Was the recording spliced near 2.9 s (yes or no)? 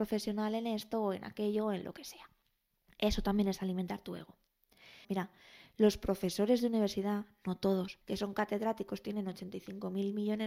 no